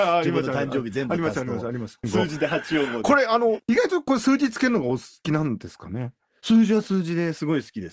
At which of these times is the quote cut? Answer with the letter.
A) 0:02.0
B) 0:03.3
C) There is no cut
A